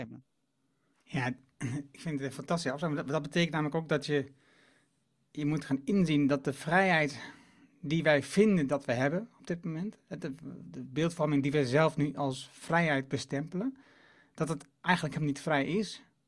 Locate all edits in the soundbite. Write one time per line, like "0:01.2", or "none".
none